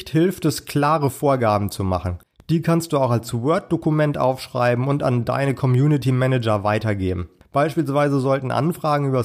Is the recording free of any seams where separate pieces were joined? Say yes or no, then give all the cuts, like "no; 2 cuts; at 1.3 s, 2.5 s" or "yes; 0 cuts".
yes; 0 cuts